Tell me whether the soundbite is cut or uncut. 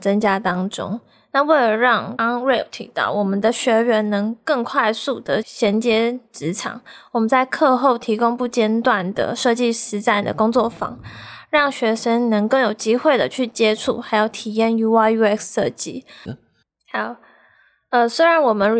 cut